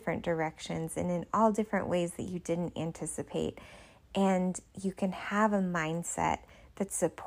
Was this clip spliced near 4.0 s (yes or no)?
no